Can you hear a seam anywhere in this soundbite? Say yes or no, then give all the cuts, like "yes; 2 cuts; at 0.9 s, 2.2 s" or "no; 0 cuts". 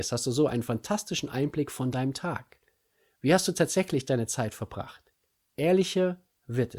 no; 0 cuts